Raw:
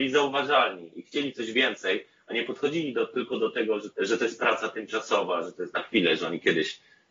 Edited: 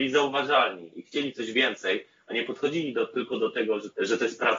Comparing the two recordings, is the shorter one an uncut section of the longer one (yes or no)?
yes